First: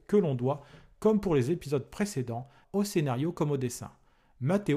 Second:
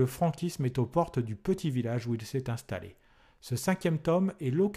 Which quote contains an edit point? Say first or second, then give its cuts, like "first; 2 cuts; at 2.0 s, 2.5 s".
first; 1 cut; at 2.6 s